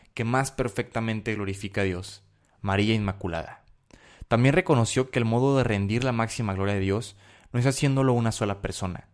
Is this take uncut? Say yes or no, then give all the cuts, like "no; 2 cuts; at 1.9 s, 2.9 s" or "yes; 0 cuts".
yes; 0 cuts